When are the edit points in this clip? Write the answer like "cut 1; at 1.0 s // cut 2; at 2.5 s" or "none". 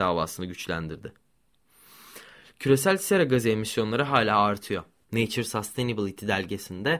cut 1; at 5.0 s